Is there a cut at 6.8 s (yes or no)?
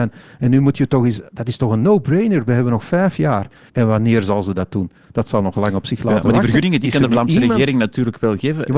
no